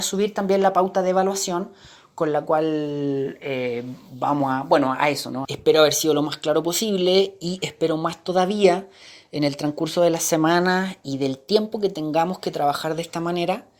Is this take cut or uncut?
cut